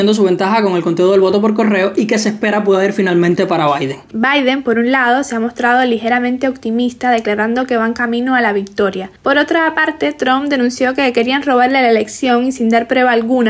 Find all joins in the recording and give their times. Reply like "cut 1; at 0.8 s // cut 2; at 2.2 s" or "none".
cut 1; at 4.1 s